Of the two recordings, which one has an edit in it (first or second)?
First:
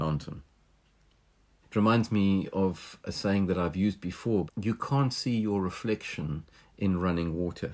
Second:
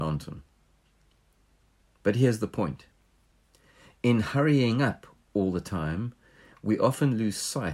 first